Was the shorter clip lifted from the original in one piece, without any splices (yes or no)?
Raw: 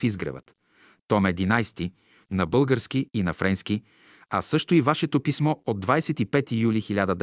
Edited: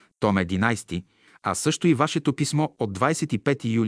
no